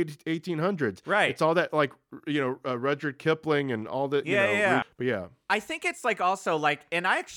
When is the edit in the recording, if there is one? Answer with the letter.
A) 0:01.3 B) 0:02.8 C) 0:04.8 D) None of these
C